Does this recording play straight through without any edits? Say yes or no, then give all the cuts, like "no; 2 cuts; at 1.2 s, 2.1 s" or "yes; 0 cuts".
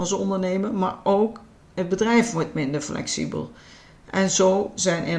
no; 1 cut; at 4.0 s